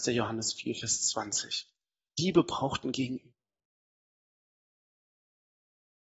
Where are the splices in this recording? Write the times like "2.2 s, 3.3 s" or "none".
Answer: none